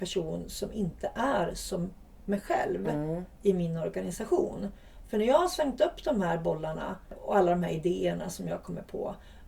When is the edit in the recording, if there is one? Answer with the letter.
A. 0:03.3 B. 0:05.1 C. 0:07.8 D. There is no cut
D